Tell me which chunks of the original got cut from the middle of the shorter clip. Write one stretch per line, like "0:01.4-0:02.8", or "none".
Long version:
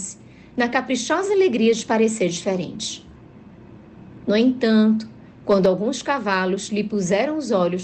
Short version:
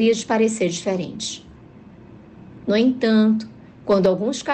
none

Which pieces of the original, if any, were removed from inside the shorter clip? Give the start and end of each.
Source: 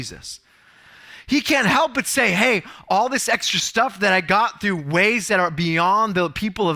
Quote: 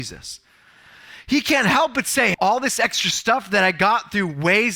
0:02.3-0:02.8

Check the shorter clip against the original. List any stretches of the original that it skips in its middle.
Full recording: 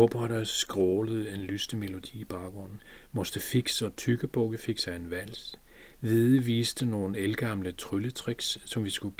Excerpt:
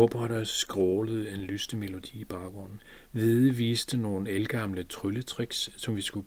0:03.1-0:05.9

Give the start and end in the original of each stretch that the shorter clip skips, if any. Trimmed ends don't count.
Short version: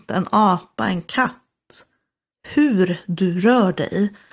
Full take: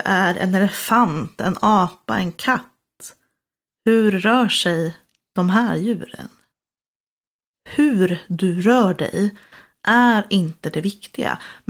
0:03.6-0:07.5

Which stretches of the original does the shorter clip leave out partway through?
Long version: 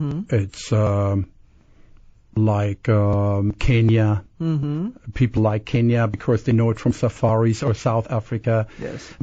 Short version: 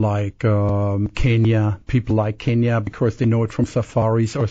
0:04.3-0:05.1

